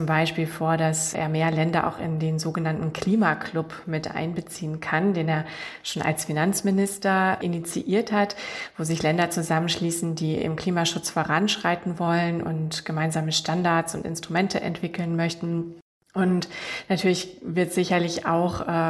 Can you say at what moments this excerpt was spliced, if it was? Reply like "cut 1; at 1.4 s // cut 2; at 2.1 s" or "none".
none